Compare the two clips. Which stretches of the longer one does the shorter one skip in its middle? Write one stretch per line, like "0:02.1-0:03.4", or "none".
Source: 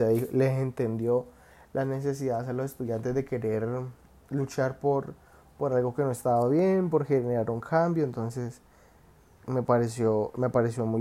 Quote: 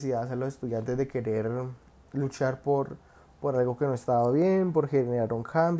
none